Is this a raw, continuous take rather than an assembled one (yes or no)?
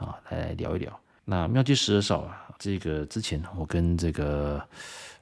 no